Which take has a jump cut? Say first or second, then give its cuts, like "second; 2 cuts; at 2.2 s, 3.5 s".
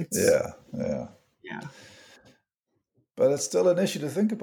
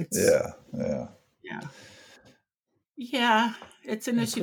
second; 1 cut; at 2.8 s